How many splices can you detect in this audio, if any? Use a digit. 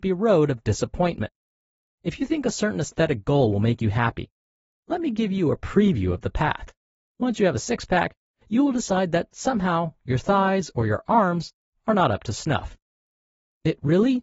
1